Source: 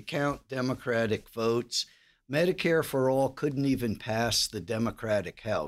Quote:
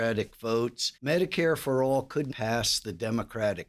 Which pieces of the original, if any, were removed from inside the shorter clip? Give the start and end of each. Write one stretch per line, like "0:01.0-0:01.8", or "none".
0:01.9-0:02.2
0:03.6-0:04.0